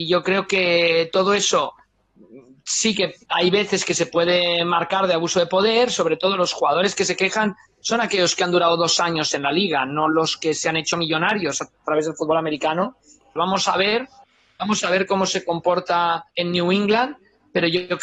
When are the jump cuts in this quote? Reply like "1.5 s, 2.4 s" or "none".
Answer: 13.4 s, 16.3 s